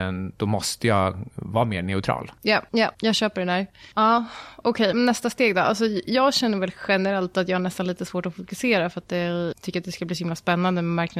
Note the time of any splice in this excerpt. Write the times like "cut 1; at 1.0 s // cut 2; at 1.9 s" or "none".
cut 1; at 4.9 s // cut 2; at 9.5 s